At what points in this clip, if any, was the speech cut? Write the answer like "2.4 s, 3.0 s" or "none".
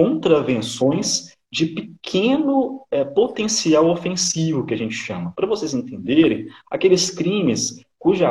6.6 s